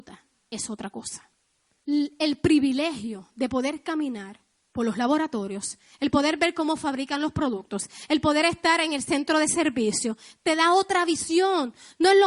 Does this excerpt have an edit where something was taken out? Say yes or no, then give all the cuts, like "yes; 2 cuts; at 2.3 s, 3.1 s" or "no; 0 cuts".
yes; 1 cut; at 1.8 s